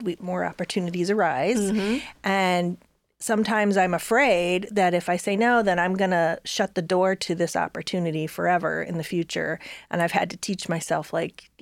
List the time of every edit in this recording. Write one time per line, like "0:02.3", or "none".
none